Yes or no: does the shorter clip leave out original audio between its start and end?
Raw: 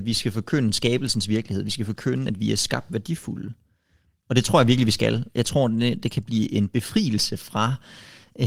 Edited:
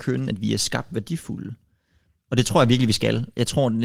no